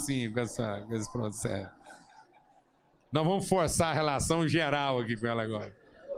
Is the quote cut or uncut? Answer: uncut